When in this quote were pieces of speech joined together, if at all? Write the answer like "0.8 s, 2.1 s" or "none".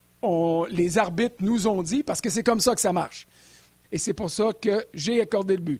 3.8 s